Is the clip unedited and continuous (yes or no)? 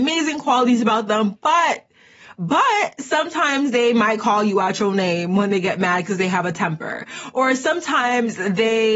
yes